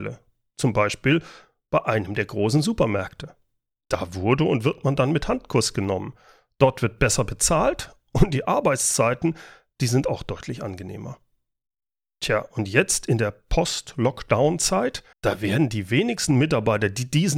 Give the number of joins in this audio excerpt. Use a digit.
1